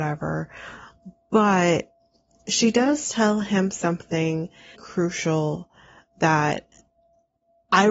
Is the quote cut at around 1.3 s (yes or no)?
no